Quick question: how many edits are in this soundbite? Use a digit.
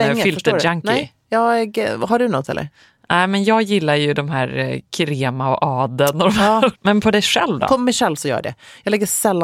1